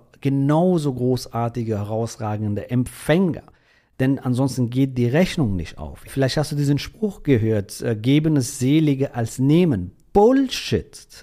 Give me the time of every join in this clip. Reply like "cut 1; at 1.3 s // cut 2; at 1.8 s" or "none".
none